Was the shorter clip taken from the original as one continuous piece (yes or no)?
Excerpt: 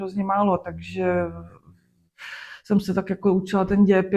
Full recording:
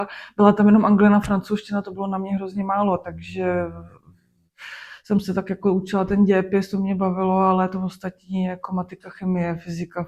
yes